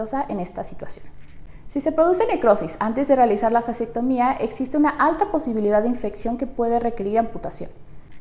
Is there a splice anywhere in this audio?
no; 0 cuts

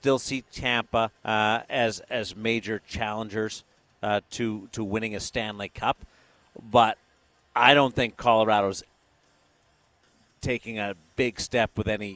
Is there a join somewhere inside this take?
yes; 1 cut; at 1.2 s

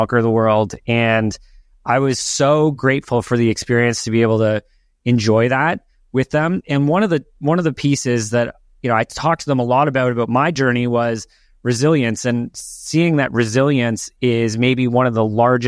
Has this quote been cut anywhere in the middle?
no; 0 cuts

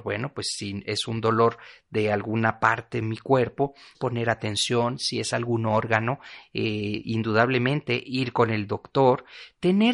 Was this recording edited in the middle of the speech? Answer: yes; 1 cut; at 3.9 s

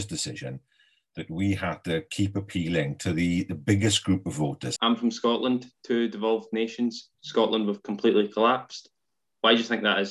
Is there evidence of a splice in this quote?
yes; 2 cuts; at 4.8 s, 7.1 s

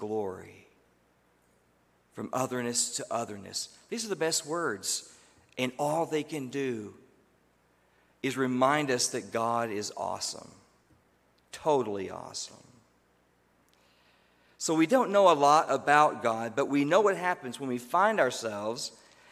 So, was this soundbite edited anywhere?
no; 0 cuts

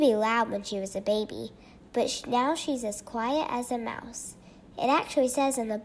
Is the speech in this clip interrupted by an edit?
no; 0 cuts

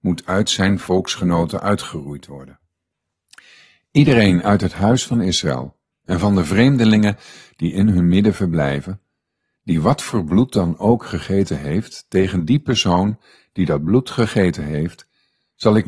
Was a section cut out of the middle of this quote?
no; 0 cuts

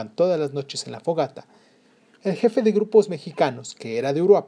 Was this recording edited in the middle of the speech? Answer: no; 0 cuts

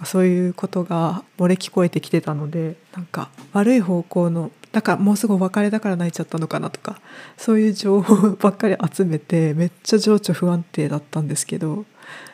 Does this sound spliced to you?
yes; 2 cuts; at 1.2 s, 2.8 s

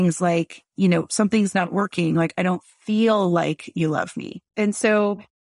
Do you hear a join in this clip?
yes; 1 cut; at 4.5 s

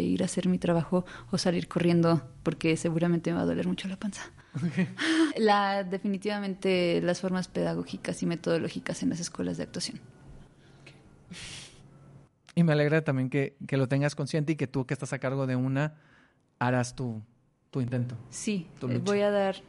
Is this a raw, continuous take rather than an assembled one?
no; 1 cut; at 5.3 s

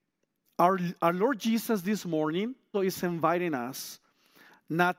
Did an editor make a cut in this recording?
yes; 1 cut; at 2.7 s

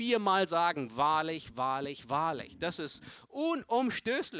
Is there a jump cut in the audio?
yes; 1 cut; at 1.5 s

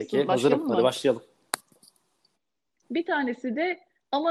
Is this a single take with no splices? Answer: no; 1 cut; at 2.9 s

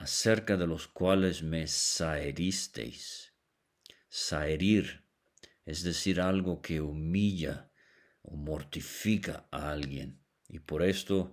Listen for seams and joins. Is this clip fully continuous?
yes; 0 cuts

